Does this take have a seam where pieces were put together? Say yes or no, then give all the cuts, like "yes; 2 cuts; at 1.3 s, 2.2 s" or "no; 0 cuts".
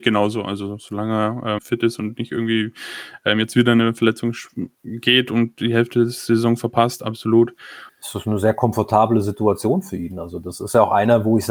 yes; 2 cuts; at 1.6 s, 7.9 s